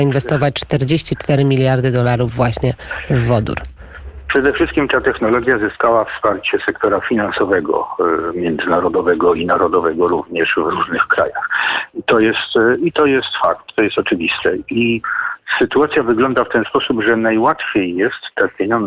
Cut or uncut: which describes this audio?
uncut